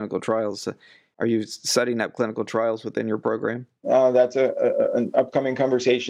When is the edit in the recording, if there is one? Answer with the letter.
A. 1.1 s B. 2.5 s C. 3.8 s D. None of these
C